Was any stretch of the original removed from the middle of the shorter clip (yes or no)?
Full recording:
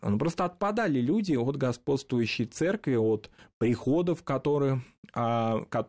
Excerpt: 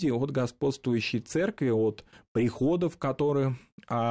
no